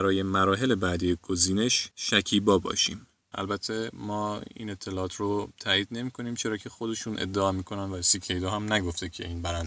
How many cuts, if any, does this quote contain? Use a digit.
1